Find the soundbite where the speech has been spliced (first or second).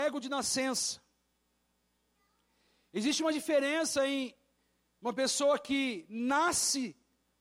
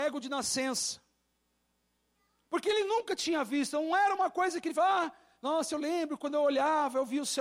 second